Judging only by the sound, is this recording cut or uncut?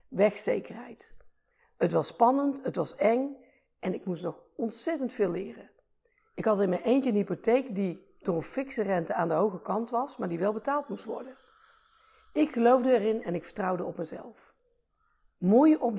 uncut